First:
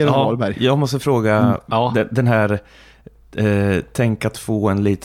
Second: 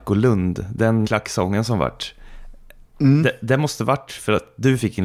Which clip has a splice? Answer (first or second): second